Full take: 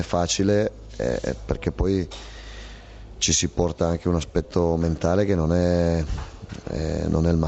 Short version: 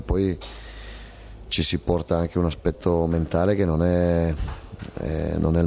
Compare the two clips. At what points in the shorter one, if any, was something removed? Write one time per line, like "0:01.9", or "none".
none